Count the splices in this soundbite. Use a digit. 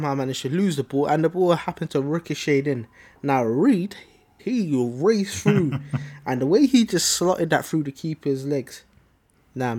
1